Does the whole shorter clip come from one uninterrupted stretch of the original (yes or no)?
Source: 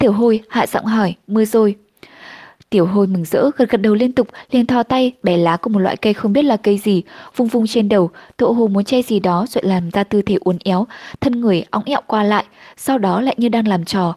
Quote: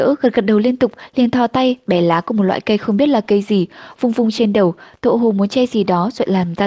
yes